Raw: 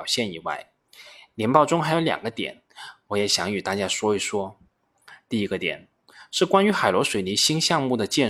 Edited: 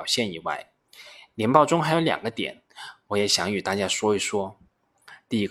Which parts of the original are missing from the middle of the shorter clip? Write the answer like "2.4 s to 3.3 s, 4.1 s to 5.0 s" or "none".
none